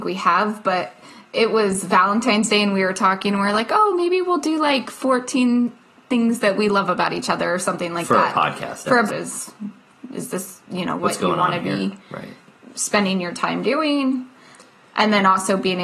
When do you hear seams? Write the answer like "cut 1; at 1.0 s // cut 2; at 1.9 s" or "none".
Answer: cut 1; at 9.1 s // cut 2; at 11.0 s